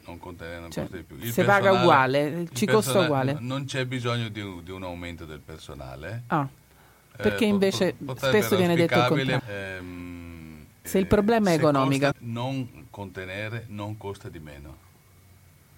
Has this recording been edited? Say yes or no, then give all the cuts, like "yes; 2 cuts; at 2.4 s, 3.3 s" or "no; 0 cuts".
yes; 3 cuts; at 9.4 s, 10.8 s, 12.1 s